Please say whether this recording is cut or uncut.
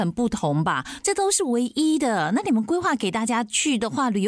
cut